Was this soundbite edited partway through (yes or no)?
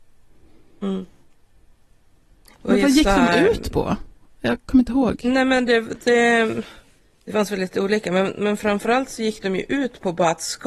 no